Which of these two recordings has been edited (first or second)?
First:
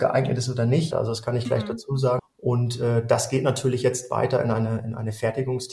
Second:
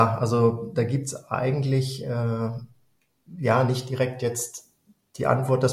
first